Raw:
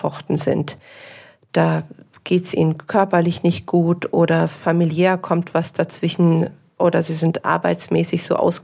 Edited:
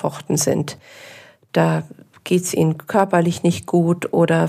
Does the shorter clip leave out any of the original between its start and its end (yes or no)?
no